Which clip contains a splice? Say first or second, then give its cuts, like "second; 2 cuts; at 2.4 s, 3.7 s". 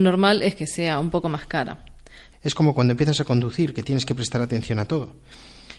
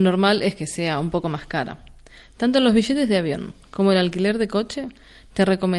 first; 1 cut; at 2.3 s